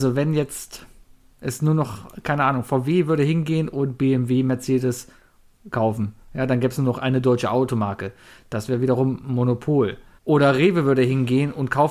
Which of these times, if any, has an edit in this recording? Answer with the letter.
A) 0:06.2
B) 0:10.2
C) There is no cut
B